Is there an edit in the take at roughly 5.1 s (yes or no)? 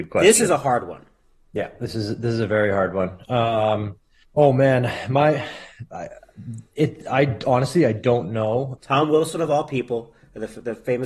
no